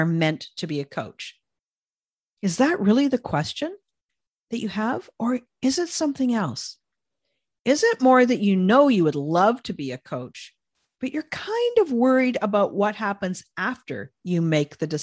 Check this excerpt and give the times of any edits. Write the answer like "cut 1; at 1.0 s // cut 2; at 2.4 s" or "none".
none